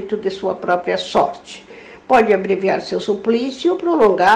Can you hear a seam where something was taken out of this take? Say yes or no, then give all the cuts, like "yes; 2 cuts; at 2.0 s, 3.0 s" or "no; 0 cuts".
no; 0 cuts